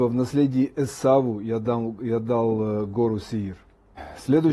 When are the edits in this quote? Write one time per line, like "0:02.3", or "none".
none